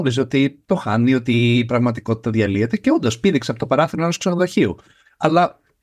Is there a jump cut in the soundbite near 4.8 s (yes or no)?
no